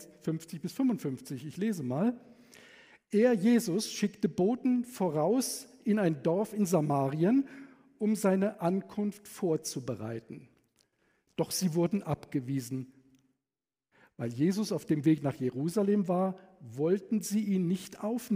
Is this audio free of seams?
yes; 0 cuts

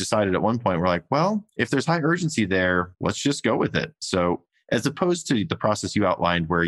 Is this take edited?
no; 0 cuts

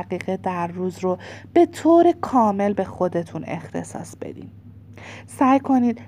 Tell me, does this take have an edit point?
no; 0 cuts

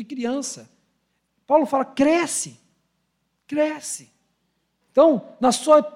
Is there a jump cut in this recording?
yes; 1 cut; at 4.8 s

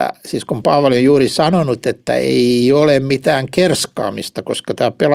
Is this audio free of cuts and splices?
yes; 0 cuts

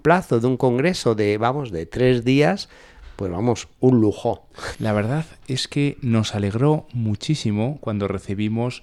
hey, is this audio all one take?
no; 1 cut; at 4.7 s

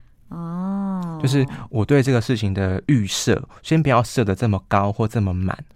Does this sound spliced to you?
no; 0 cuts

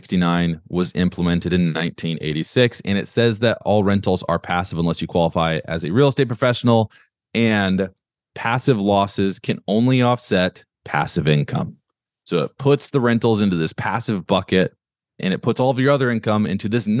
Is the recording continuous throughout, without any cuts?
yes; 0 cuts

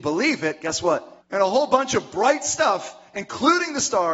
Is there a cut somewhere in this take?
yes; 1 cut; at 1.2 s

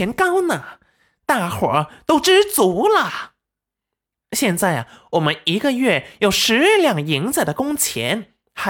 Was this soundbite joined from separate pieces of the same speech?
yes; 1 cut; at 4.2 s

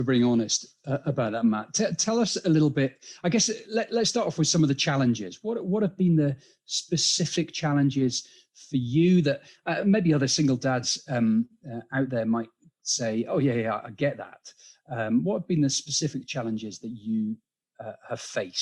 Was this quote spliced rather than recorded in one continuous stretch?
no; 0 cuts

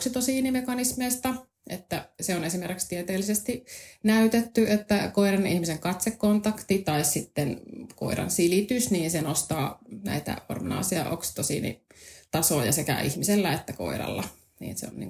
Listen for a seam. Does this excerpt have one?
yes; 1 cut; at 2.2 s

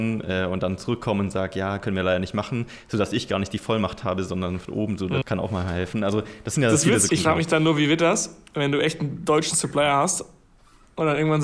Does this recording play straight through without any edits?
no; 2 cuts; at 5.2 s, 7.1 s

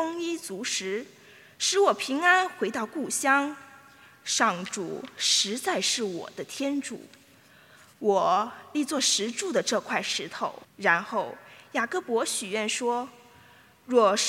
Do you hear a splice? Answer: yes; 1 cut; at 10.6 s

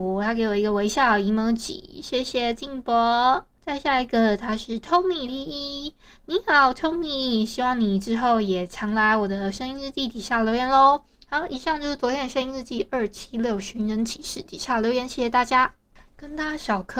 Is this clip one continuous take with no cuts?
no; 1 cut; at 5.3 s

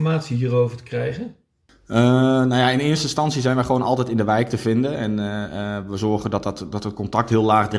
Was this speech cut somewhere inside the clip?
no; 0 cuts

